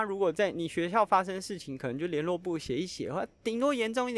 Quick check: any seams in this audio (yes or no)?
no